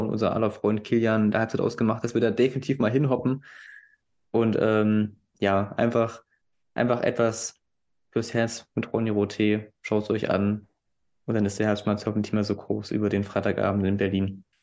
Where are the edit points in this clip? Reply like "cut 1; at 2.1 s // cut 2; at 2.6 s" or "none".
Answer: none

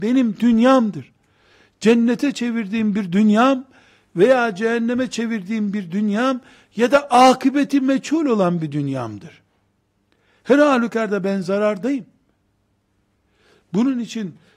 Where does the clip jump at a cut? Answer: none

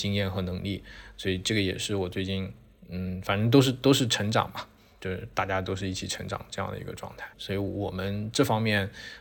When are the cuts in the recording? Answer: cut 1; at 7.3 s

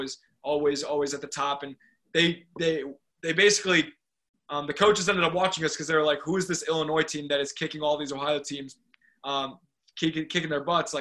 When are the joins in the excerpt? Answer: none

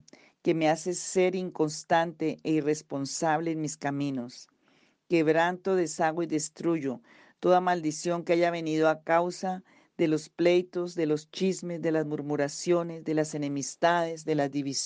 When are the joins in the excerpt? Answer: none

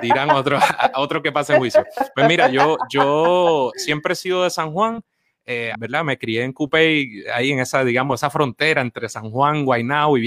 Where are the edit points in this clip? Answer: cut 1; at 5.8 s

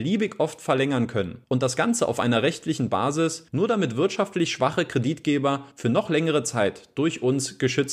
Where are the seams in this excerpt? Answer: cut 1; at 3.5 s

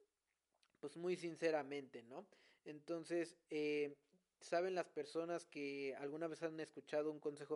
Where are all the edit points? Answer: none

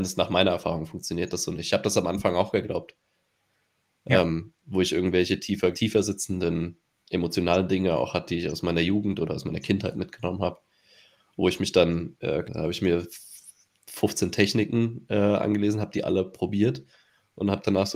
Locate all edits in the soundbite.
cut 1; at 5.7 s // cut 2; at 12.5 s

